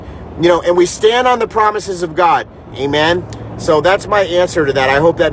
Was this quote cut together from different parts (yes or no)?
yes